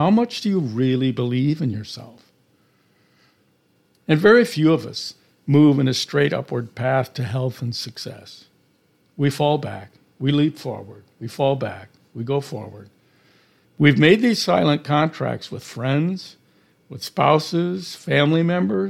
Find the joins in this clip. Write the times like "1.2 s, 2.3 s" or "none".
13.6 s